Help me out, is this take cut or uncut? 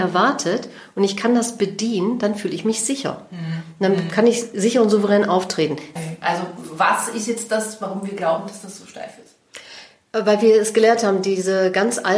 cut